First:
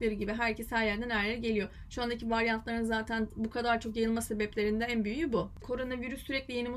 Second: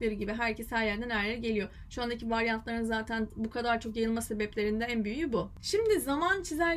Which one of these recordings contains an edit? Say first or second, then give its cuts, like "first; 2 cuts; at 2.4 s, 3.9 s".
first; 1 cut; at 5.6 s